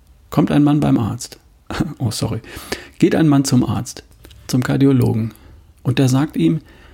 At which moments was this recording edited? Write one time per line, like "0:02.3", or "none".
none